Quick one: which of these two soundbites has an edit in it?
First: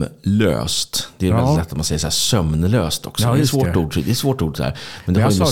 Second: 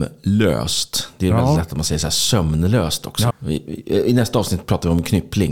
second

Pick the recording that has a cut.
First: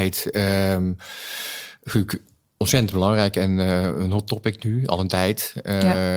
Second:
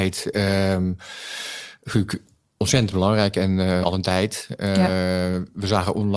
second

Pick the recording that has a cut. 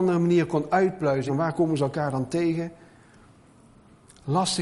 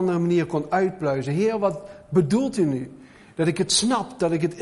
first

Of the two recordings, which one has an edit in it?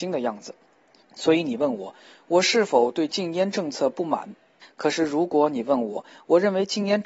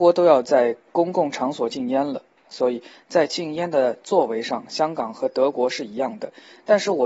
first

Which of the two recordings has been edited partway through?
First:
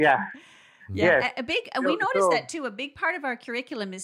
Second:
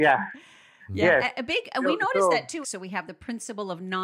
second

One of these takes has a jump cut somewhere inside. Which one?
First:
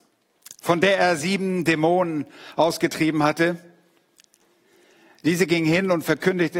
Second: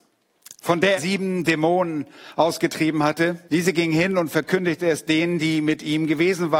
second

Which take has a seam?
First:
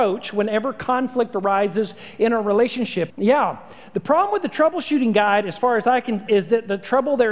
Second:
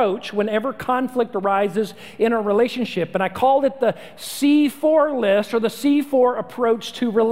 first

